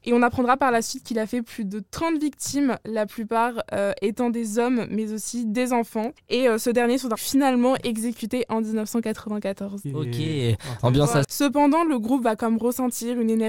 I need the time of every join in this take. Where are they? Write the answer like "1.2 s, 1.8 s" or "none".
7.2 s, 11.2 s